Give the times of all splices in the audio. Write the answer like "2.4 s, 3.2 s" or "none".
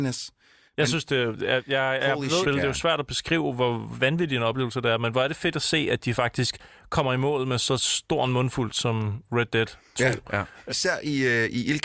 2.4 s, 10.7 s